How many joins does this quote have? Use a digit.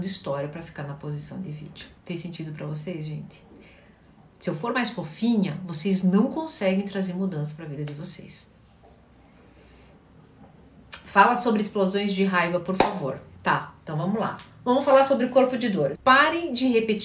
3